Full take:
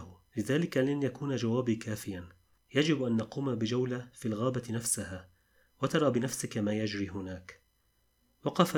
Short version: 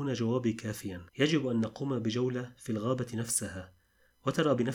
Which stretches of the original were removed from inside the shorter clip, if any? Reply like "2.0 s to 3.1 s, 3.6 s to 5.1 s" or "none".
2.3 s to 2.6 s